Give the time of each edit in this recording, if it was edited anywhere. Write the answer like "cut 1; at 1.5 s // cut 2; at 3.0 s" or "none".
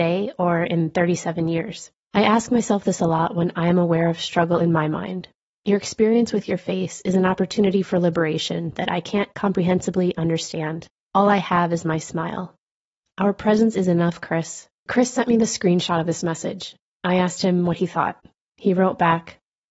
cut 1; at 14.9 s